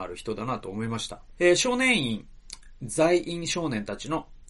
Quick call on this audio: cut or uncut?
cut